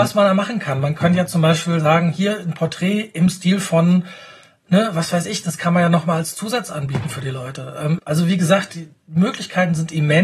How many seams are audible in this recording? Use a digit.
1